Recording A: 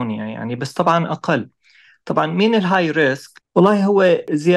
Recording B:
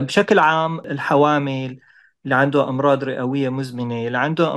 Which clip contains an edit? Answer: A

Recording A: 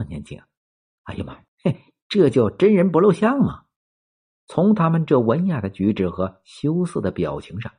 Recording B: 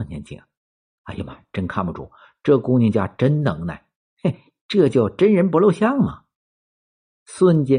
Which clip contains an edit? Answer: A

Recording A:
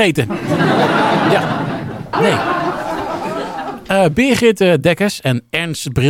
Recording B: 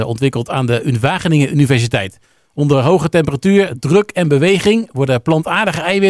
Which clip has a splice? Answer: A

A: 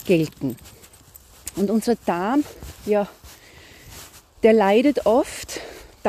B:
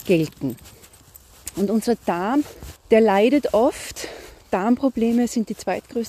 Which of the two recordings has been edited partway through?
B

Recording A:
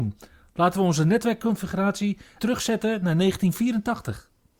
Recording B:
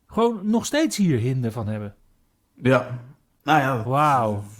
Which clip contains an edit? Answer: A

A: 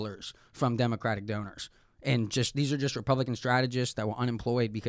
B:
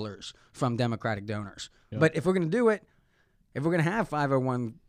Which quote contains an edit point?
B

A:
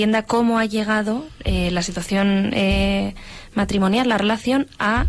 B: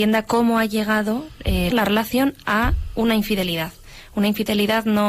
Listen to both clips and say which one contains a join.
B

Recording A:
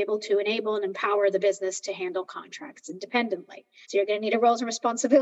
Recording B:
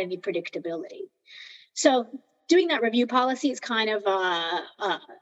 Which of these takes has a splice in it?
A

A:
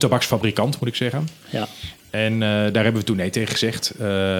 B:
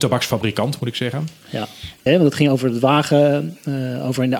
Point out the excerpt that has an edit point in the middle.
B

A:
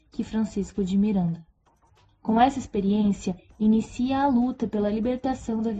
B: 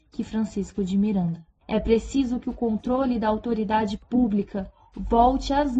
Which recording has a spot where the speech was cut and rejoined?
B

